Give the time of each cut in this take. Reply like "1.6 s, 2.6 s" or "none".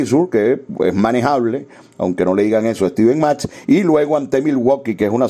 none

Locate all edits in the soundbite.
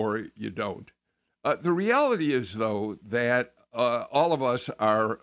none

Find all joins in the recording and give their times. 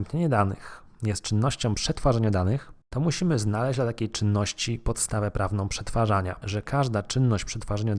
2.8 s, 6.4 s

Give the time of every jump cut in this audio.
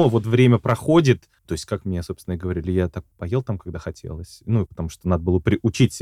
1.4 s, 3.1 s, 4.6 s

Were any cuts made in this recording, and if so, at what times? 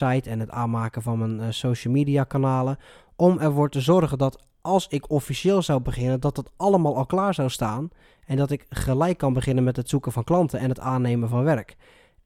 none

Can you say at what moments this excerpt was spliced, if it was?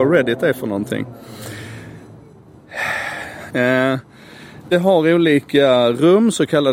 3.5 s

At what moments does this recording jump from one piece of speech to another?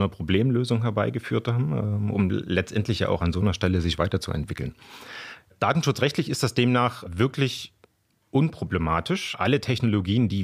none

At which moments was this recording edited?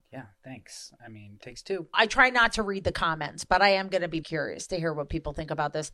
1.9 s, 4.2 s

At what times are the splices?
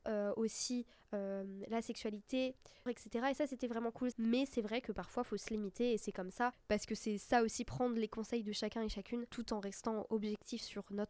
2.9 s, 4.1 s, 6.5 s

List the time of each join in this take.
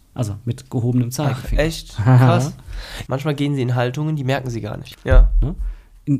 3.0 s, 4.9 s

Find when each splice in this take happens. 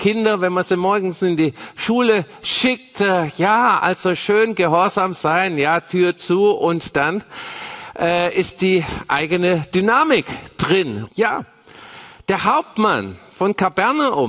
11.1 s

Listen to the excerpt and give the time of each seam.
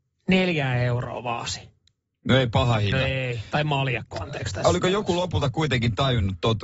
none

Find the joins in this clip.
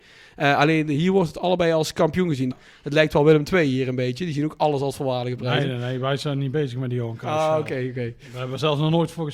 2.5 s

